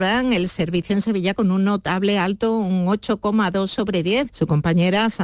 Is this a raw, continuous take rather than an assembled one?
no; 1 cut; at 4.3 s

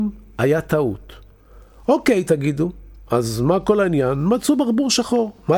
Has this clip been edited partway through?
no; 0 cuts

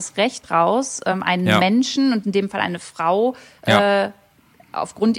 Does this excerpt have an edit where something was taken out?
no; 0 cuts

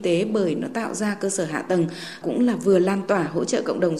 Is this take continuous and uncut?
yes; 0 cuts

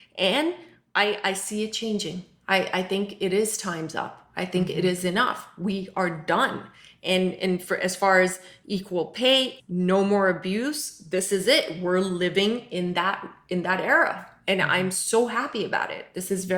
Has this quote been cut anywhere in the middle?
yes; 1 cut; at 9.6 s

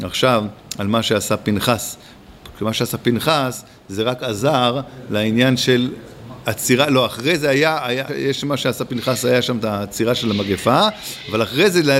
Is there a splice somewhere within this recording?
yes; 1 cut; at 8.1 s

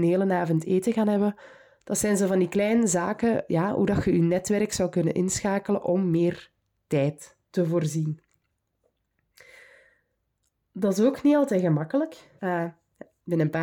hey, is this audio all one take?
no; 2 cuts; at 7.5 s, 12.4 s

